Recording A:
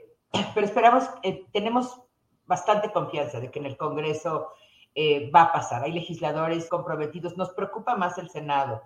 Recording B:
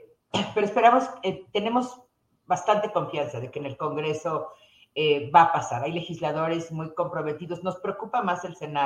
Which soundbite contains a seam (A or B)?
A